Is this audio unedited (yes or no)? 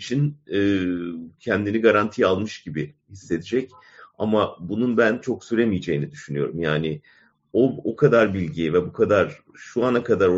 yes